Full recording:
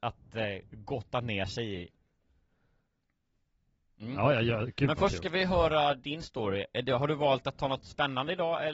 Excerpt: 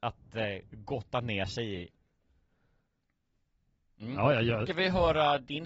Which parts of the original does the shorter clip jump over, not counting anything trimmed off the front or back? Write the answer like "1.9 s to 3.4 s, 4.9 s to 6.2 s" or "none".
4.7 s to 5.2 s